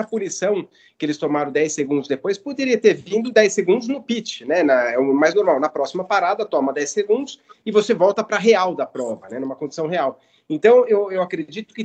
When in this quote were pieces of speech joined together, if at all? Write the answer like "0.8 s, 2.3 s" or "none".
none